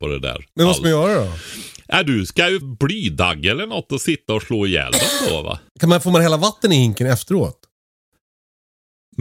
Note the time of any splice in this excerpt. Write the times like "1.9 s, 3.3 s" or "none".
2.6 s, 5.7 s